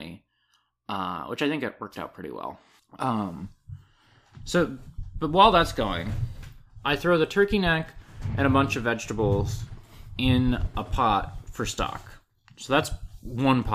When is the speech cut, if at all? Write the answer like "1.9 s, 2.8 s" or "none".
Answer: 2.8 s